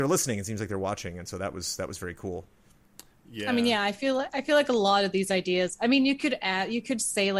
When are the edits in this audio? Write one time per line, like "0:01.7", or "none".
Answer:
none